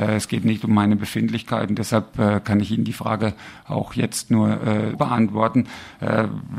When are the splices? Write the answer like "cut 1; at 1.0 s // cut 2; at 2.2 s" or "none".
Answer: cut 1; at 4.9 s